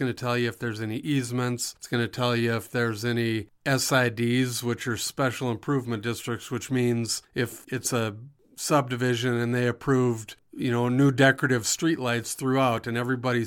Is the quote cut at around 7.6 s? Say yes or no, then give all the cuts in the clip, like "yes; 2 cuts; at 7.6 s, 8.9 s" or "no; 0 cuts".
yes; 1 cut; at 7.6 s